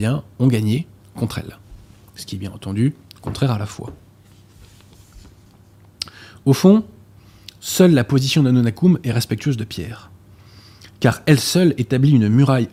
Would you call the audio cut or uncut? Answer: uncut